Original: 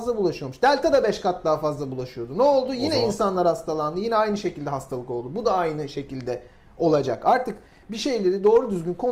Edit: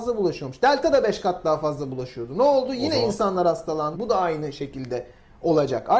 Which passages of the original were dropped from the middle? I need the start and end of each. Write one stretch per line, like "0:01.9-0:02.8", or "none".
0:03.9-0:05.3